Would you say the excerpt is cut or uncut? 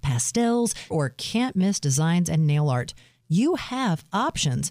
cut